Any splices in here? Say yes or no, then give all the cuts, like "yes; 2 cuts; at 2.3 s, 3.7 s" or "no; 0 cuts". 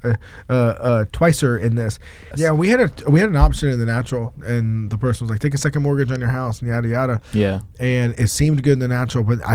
yes; 1 cut; at 2.3 s